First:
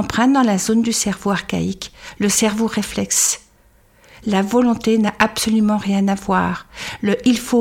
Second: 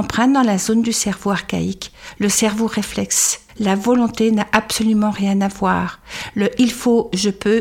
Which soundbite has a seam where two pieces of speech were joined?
second; 1 cut; at 3.5 s

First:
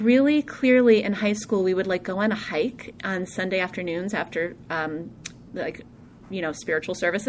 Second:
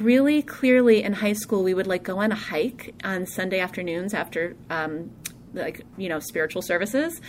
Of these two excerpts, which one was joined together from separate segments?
second; 1 cut; at 5.9 s

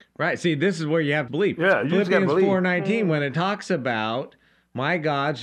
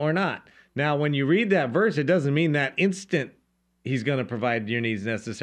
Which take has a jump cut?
first; 1 cut; at 1.3 s

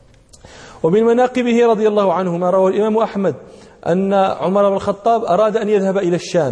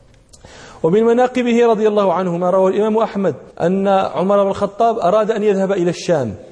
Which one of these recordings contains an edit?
second; 1 cut; at 3.5 s

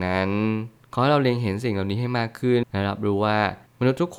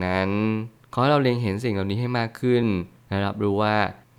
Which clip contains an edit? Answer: first; 1 cut; at 2.6 s

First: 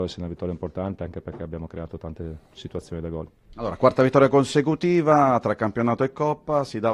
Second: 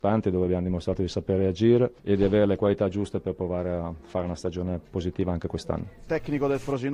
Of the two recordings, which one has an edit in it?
second; 1 cut; at 2.0 s

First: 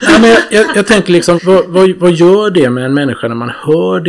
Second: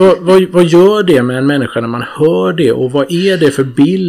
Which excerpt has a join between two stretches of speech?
first; 1 cut; at 1.4 s

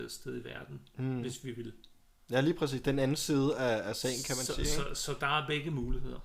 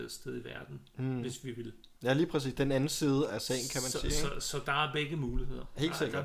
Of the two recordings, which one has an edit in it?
second; 2 cuts; at 2.0 s, 3.3 s

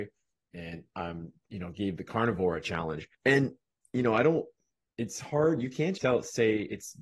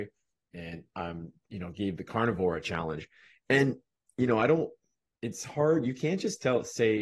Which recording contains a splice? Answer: first; 2 cuts; at 3.1 s, 6.0 s

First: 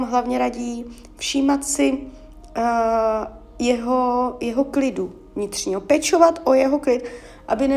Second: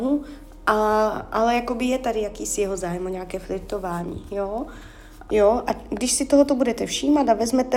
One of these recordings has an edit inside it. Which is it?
second; 1 cut; at 5.3 s

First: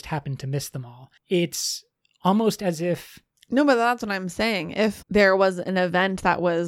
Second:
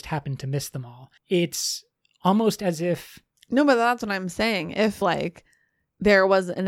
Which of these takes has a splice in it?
first; 1 cut; at 5.0 s

